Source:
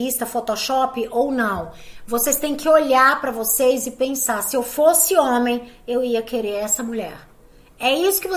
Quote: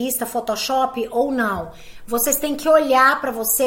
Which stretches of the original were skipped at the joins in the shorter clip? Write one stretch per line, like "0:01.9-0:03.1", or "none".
none